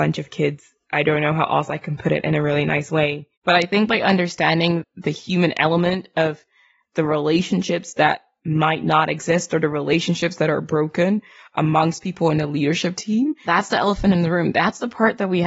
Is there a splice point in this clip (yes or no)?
yes